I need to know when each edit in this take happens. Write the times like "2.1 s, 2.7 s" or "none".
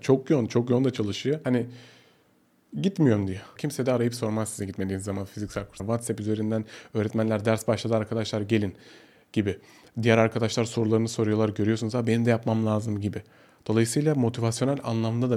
3.6 s, 5.8 s